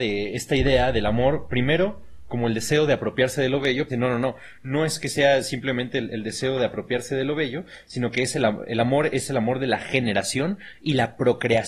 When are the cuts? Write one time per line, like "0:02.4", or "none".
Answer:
0:03.9